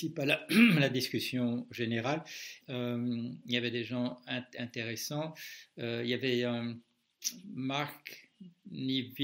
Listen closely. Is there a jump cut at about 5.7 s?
no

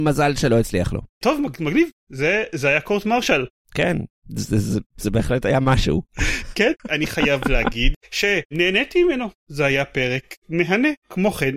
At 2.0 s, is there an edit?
no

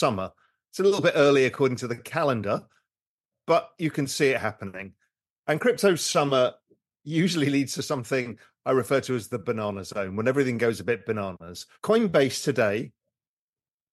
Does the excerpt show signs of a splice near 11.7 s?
yes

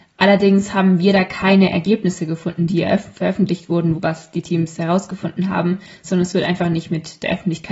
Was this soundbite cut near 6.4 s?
no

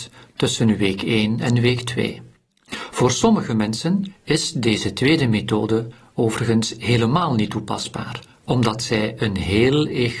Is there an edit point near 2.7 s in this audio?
yes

